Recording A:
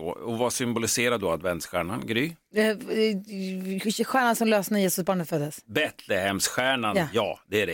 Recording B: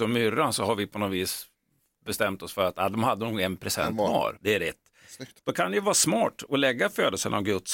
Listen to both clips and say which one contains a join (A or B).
B